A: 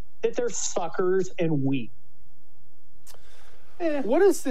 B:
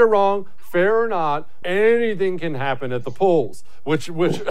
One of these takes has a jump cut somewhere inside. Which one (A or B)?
B